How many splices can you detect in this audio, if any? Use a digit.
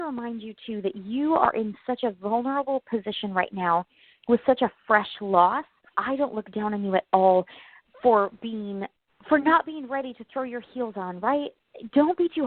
1